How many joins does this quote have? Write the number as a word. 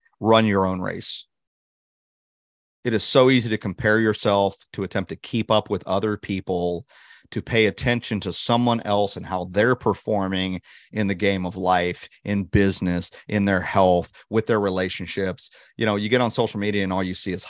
zero